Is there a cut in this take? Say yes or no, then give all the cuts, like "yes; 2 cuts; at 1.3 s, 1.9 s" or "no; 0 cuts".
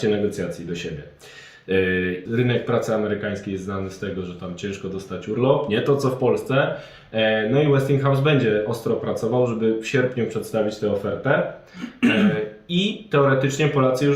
yes; 1 cut; at 2.2 s